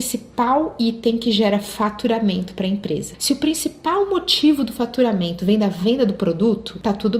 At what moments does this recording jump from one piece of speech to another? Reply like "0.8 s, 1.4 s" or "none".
none